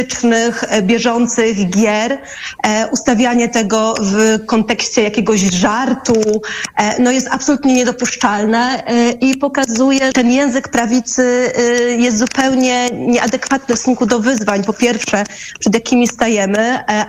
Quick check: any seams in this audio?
yes; 1 cut; at 10.1 s

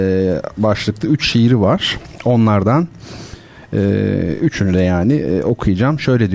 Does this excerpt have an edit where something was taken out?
no; 0 cuts

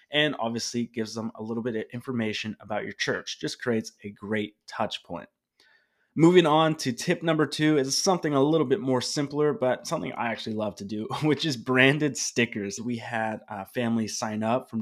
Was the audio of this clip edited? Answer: yes; 1 cut; at 12.8 s

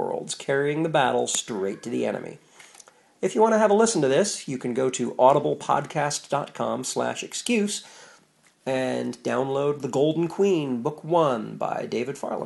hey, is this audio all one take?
no; 1 cut; at 8.5 s

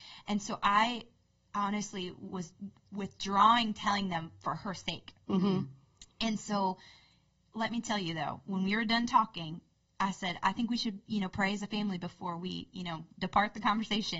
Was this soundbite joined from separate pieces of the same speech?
no; 0 cuts

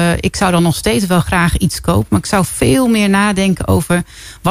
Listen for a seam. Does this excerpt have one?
no; 0 cuts

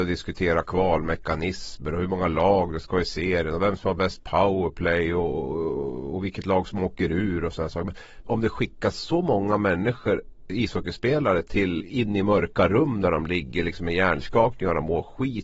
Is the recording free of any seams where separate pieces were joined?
no; 2 cuts; at 8.3 s, 11.8 s

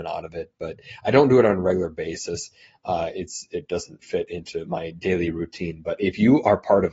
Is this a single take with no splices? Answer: no; 1 cut; at 4.0 s

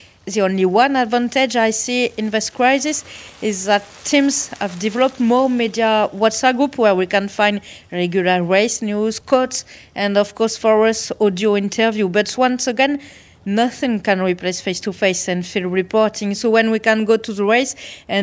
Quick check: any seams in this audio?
no; 0 cuts

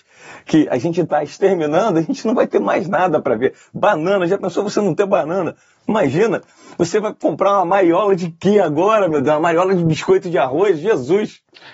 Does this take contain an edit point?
no; 0 cuts

